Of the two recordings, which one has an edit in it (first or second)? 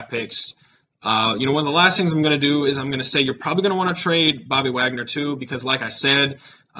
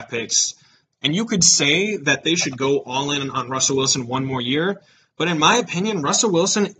second